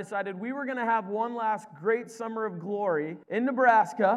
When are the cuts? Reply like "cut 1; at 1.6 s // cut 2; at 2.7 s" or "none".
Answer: cut 1; at 3.2 s